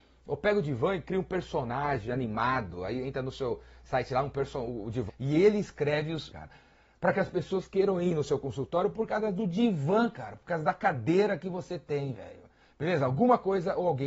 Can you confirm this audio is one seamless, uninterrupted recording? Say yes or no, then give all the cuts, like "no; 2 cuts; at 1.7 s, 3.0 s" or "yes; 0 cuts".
no; 2 cuts; at 5.1 s, 6.3 s